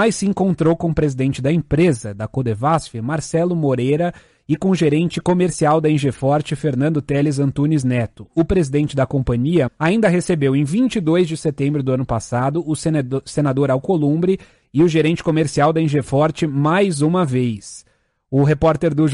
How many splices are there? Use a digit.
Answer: 1